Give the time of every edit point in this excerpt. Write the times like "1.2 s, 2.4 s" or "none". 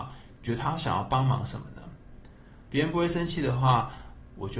2.7 s